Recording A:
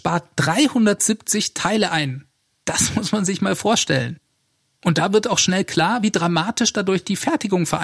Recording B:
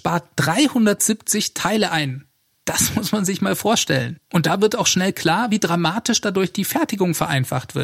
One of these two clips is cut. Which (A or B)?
B